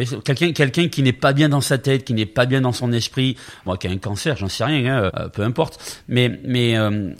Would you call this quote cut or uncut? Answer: cut